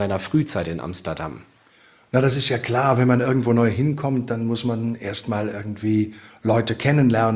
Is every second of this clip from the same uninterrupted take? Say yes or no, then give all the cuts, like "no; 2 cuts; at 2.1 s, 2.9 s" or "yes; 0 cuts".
yes; 0 cuts